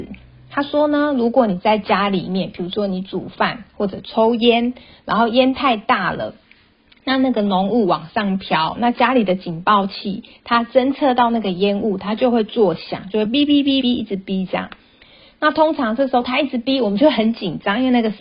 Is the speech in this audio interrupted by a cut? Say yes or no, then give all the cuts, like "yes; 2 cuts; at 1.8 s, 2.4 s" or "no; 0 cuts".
yes; 1 cut; at 13.8 s